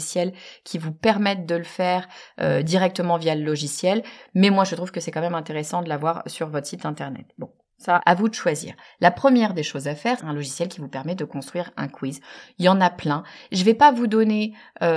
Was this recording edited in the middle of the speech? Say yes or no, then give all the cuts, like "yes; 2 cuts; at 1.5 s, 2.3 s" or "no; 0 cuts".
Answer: yes; 2 cuts; at 8.0 s, 10.2 s